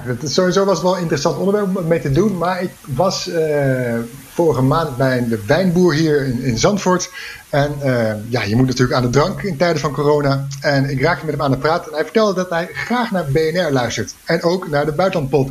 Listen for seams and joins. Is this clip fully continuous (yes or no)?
yes